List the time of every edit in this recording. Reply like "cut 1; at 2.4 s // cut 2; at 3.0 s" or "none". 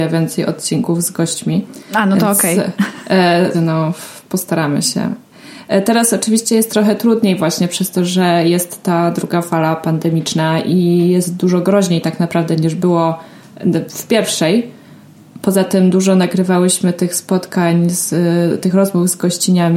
cut 1; at 3.5 s